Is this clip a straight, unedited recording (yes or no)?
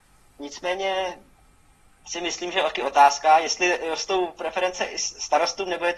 yes